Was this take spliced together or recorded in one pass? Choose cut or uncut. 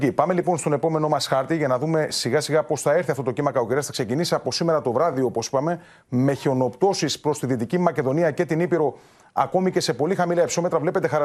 uncut